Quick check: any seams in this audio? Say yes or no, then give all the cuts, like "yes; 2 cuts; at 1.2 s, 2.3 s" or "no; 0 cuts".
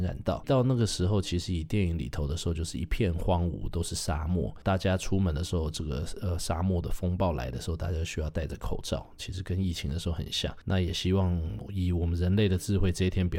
no; 0 cuts